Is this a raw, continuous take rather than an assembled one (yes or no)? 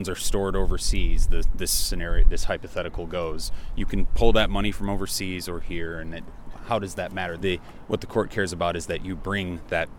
no